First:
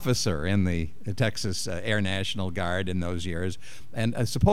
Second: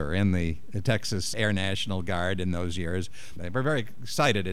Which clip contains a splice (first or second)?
second